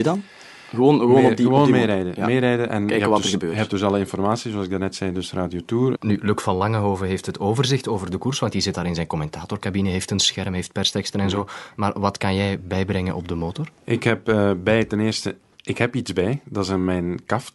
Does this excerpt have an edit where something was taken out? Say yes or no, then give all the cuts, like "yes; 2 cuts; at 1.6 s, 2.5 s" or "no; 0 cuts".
yes; 1 cut; at 6.0 s